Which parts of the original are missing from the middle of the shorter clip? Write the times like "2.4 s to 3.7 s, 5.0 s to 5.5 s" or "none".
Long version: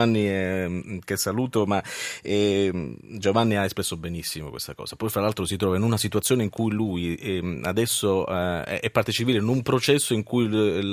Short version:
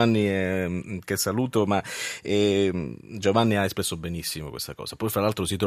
none